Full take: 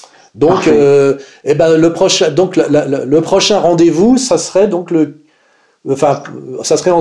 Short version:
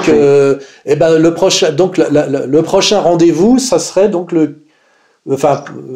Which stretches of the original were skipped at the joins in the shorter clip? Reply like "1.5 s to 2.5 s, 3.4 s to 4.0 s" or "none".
none

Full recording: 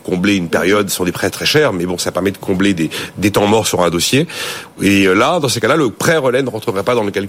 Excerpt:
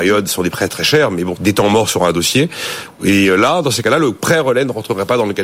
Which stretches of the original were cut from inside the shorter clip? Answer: 2.0 s to 3.1 s

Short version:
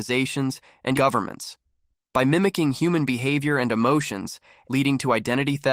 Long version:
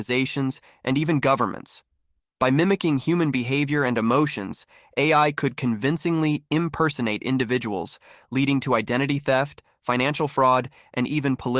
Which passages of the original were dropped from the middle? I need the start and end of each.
0.9 s to 1.2 s, 4.9 s to 8.3 s

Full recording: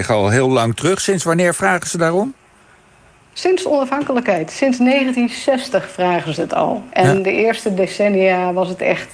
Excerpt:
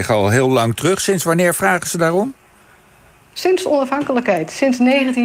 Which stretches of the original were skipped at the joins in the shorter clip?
none

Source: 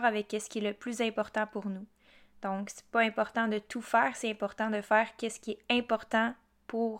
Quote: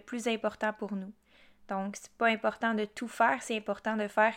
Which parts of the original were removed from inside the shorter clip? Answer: none

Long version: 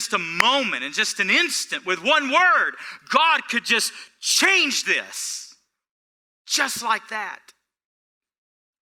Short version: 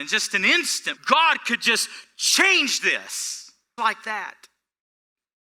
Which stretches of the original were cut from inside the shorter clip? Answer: 1.8 s to 3.0 s, 5.8 s to 6.8 s

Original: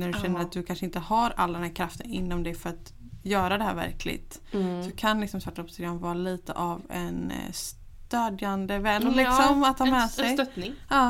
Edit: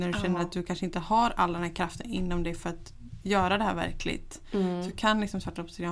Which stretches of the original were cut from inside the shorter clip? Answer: none

